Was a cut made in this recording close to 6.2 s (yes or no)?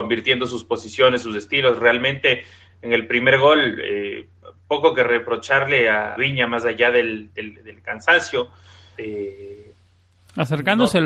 yes